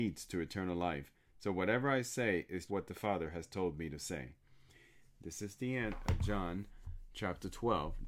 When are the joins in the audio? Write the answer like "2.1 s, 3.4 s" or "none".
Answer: 2.7 s